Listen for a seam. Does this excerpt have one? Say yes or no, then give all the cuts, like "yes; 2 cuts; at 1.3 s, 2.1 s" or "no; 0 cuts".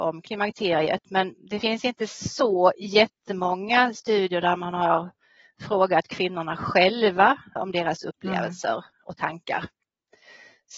yes; 1 cut; at 7.6 s